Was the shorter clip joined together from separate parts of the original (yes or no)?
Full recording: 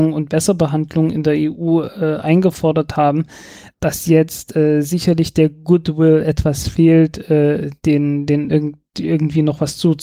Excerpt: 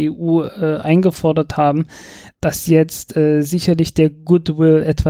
no